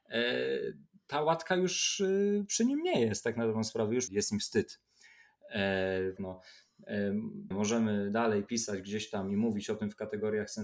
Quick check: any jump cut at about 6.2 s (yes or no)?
yes